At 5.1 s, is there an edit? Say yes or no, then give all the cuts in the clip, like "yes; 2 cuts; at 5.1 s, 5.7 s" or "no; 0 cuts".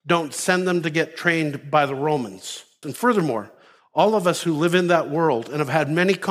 no; 1 cut; at 2.8 s